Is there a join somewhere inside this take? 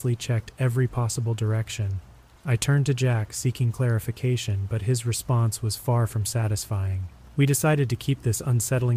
yes; 2 cuts; at 2.4 s, 7.2 s

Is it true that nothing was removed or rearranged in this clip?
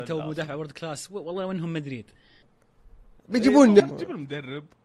no; 1 cut; at 3.8 s

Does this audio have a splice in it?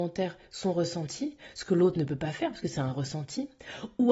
no; 0 cuts

